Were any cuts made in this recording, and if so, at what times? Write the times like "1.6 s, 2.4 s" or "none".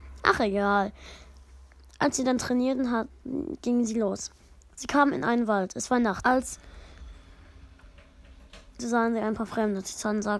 6.2 s, 8.8 s